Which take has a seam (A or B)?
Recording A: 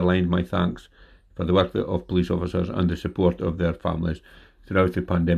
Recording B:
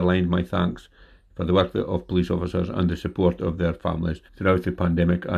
B